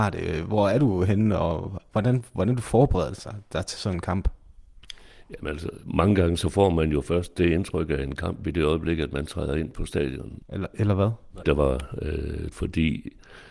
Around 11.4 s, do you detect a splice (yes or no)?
yes